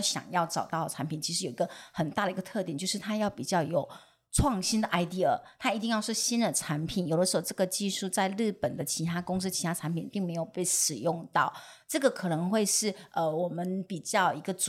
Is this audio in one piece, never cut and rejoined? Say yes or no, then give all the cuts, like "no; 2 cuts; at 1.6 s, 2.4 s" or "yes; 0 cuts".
yes; 0 cuts